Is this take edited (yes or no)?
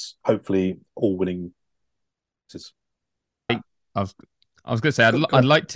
yes